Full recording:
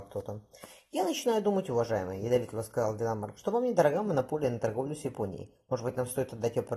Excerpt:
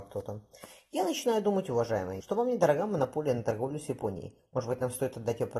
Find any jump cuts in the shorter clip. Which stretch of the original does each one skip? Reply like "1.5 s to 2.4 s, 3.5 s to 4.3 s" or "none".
2.2 s to 3.4 s